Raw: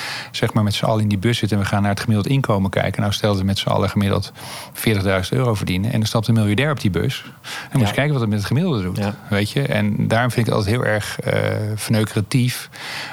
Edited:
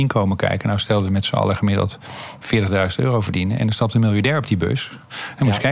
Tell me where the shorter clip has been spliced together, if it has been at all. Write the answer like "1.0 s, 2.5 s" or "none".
none